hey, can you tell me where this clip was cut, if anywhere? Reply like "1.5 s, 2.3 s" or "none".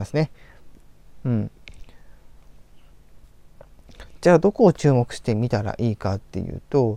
none